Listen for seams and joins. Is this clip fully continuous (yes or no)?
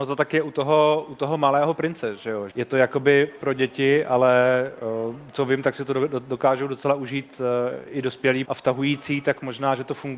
no